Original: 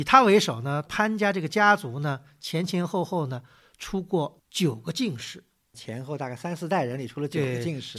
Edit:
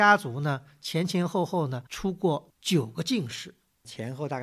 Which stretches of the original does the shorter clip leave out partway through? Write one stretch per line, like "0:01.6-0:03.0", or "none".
0:03.5-0:03.8